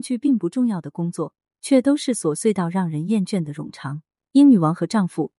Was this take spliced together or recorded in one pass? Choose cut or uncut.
cut